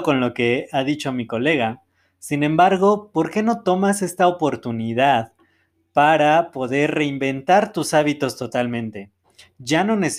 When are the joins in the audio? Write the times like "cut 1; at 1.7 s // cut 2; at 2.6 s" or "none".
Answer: none